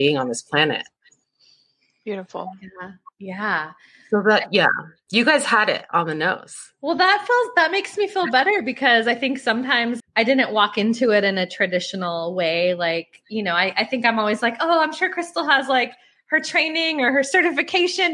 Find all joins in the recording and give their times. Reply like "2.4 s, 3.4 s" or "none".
10.0 s